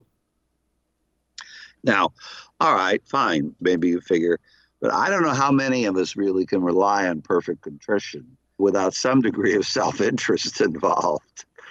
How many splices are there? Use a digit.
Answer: 3